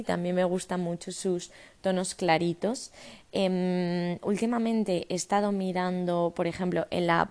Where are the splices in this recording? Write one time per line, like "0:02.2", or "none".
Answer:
none